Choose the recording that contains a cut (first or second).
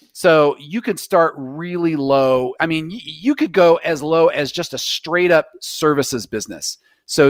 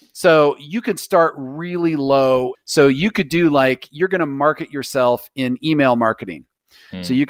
second